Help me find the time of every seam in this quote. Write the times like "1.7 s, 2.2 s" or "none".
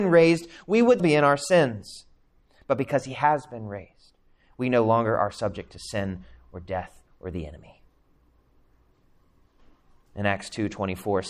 1.0 s